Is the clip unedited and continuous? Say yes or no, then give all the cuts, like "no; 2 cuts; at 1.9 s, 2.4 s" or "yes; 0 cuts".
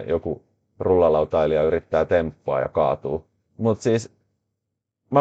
yes; 0 cuts